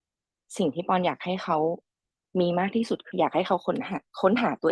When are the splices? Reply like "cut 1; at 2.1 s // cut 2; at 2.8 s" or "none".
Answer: cut 1; at 3.1 s